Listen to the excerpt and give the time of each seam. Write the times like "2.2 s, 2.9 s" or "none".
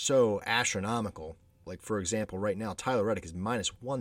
1.7 s